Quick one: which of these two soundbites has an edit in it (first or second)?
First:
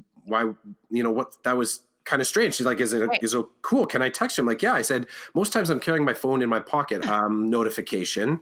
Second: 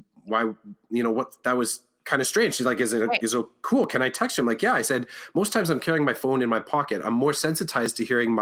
first